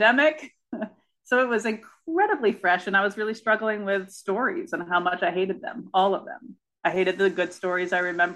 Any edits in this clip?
no; 0 cuts

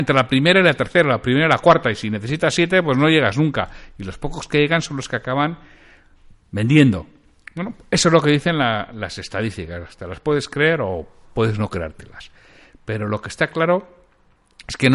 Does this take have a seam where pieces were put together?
no; 0 cuts

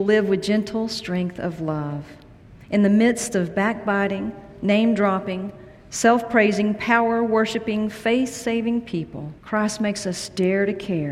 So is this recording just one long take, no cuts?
no; 1 cut; at 9.4 s

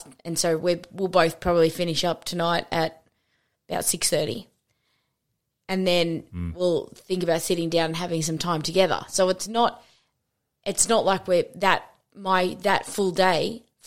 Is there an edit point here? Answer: no; 0 cuts

